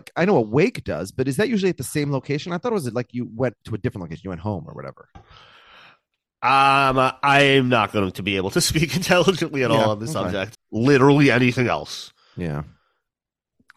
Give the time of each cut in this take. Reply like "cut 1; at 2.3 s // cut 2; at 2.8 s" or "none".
cut 1; at 10.5 s